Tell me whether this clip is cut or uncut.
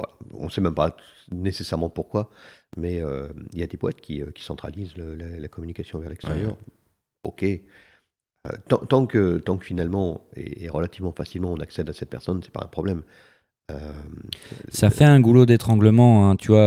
uncut